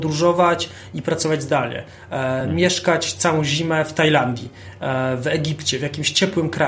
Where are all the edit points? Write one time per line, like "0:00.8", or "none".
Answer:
none